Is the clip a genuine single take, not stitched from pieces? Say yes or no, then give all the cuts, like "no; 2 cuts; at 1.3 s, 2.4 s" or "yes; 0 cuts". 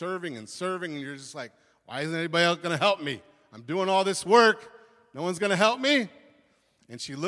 yes; 0 cuts